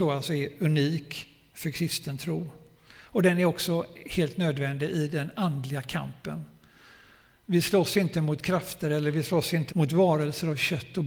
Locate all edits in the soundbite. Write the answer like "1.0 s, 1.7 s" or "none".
9.7 s